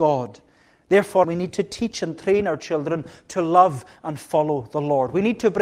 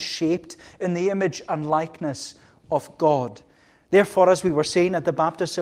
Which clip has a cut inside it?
first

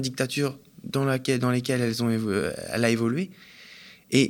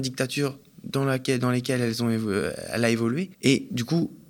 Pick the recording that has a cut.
second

